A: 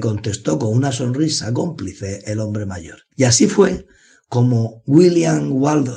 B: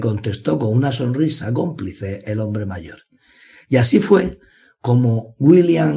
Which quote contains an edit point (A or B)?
A